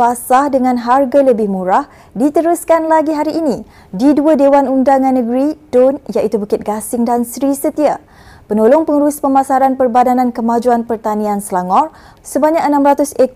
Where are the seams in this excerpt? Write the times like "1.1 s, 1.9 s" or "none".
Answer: 12.2 s

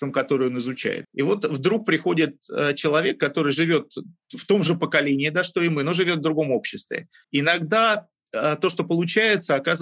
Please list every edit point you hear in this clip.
1.0 s, 7.2 s

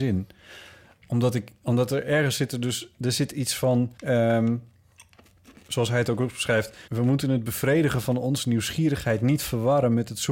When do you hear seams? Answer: 4.0 s, 6.9 s

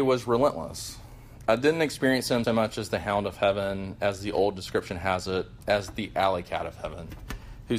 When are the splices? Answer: 2.4 s

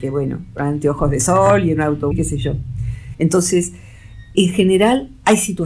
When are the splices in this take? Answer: 2.1 s, 3.1 s, 4.3 s

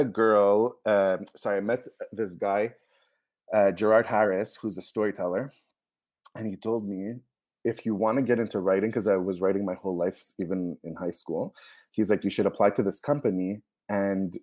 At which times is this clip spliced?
none

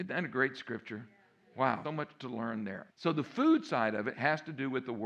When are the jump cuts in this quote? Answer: 1.8 s, 2.9 s

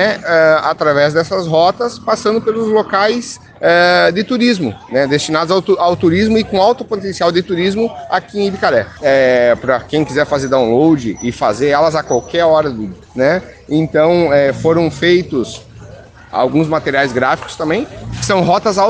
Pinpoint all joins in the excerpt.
9.0 s, 16.3 s

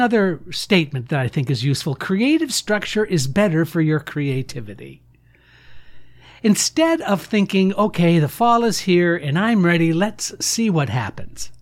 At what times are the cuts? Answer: none

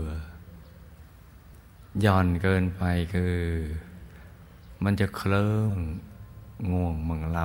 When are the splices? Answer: 5.7 s

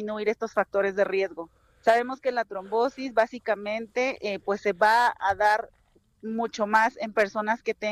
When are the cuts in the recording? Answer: none

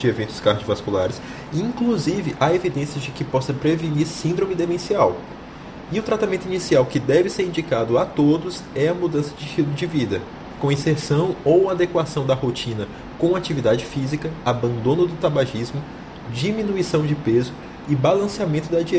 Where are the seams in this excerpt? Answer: none

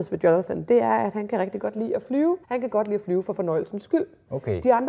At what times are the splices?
2.4 s

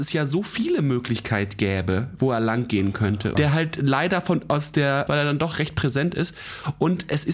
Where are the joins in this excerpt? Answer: 3.3 s, 5.1 s

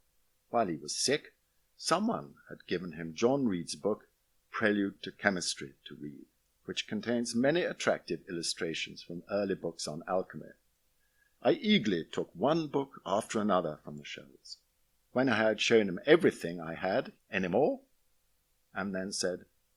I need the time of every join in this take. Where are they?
11.3 s, 15.0 s, 17.2 s

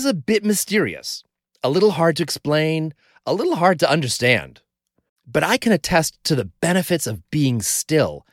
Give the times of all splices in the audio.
none

